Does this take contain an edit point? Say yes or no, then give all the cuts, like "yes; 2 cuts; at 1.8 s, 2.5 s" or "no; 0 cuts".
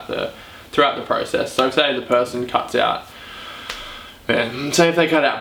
no; 0 cuts